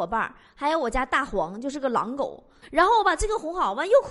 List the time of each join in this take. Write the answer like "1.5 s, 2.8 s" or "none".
2.6 s